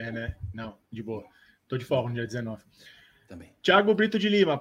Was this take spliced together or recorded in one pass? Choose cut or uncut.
uncut